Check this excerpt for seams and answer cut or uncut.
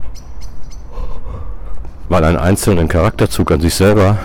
cut